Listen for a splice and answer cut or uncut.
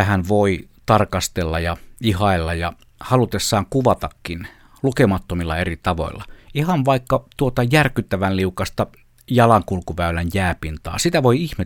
uncut